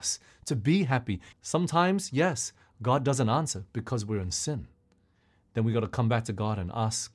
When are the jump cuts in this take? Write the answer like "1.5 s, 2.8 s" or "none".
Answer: 1.3 s